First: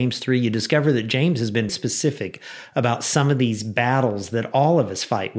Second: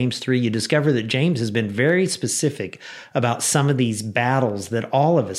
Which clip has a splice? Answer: first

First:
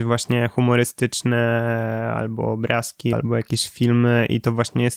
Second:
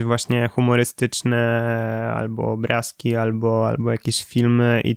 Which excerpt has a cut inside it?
first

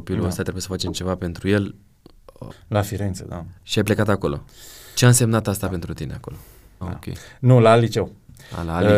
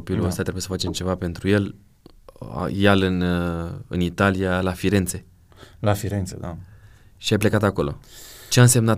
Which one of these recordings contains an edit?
first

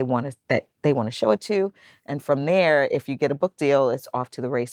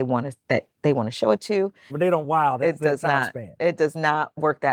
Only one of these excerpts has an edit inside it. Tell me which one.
second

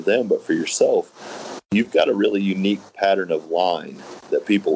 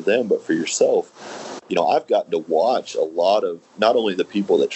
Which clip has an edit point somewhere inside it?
second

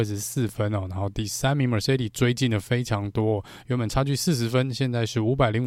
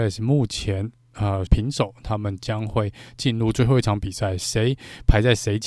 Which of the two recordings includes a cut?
second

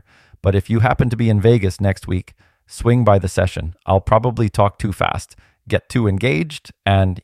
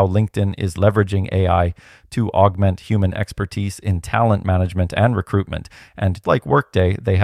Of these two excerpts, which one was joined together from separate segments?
second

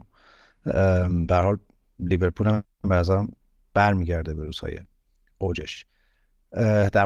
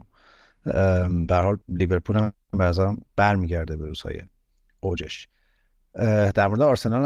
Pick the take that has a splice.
second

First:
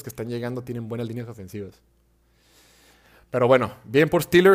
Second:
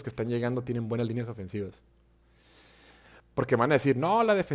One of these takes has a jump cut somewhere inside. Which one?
second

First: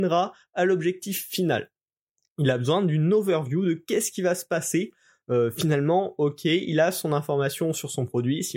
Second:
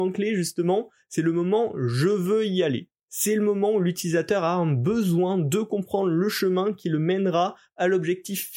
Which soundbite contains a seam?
second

